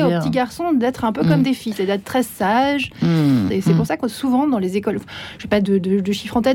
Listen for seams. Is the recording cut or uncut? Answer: cut